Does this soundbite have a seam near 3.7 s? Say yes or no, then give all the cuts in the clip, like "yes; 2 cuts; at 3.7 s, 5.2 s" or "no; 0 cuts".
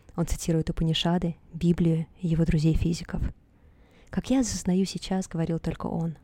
no; 0 cuts